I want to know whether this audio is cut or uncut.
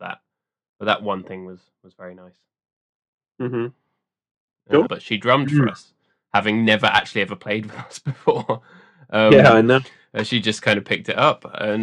cut